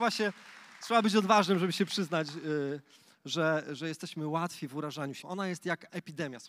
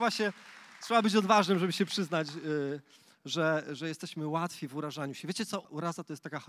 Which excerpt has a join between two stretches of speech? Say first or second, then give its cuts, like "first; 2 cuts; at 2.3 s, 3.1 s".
first; 1 cut; at 5.2 s